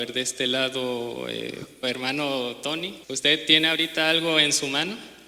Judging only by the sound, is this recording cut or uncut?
cut